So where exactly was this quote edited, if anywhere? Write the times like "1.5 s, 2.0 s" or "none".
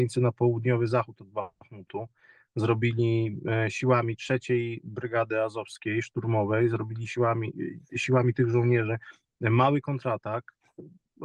none